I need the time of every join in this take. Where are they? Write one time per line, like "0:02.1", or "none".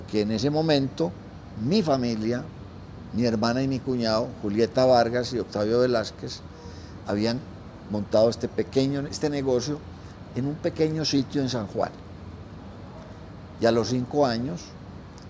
0:09.1
0:13.5